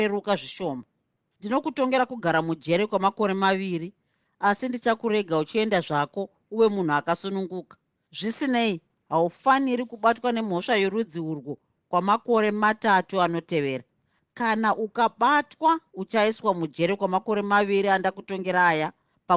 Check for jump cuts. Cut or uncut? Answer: uncut